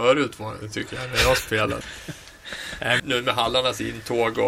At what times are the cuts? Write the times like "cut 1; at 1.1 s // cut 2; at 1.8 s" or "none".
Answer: cut 1; at 1.8 s // cut 2; at 3.0 s